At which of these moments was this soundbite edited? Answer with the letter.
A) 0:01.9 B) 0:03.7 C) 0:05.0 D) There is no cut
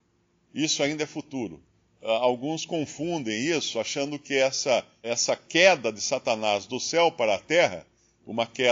C